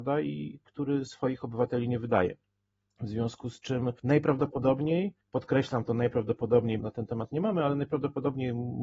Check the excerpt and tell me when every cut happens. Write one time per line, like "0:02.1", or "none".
0:05.2
0:06.8